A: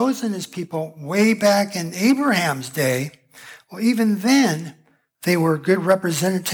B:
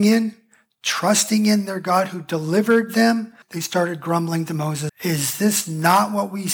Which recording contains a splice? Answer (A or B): B